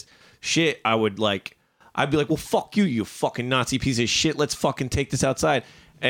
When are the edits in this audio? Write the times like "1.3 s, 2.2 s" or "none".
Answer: none